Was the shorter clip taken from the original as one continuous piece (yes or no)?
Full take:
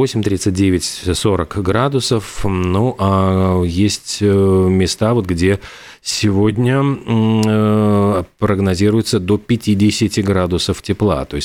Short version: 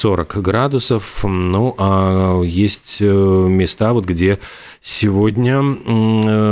yes